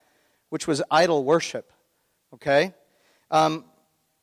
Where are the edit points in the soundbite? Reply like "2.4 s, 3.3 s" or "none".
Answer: none